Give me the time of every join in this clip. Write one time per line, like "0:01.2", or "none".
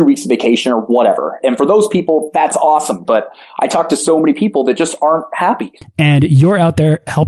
0:03.1
0:05.8

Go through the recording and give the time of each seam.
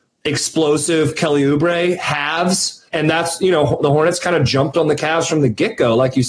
0:02.9

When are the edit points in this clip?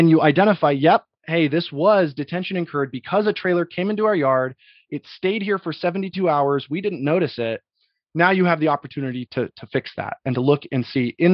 0:09.3

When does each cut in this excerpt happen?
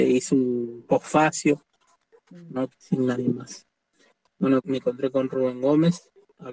0:02.7
0:04.6

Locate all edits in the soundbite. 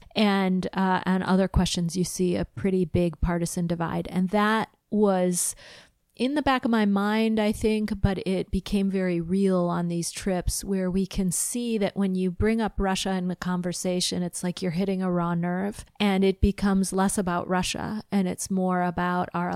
0:04.8

